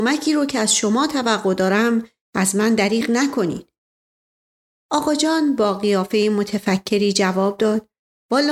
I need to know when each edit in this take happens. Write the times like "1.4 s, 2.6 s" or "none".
none